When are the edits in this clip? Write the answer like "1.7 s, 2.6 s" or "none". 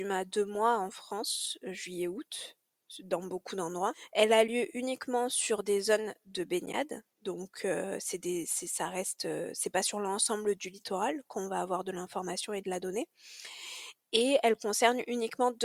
none